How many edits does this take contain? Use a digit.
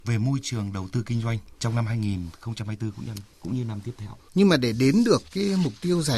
1